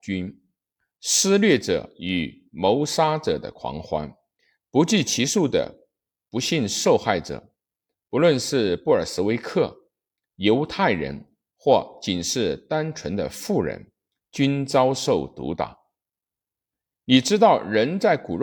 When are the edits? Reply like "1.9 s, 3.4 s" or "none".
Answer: none